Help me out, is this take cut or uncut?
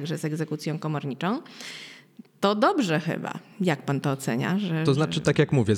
cut